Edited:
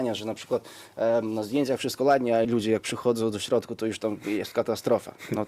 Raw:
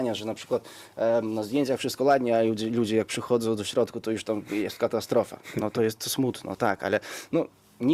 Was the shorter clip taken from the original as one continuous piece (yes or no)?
no